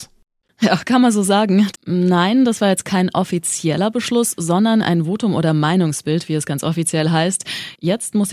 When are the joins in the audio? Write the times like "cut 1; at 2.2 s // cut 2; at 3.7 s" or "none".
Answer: cut 1; at 1.7 s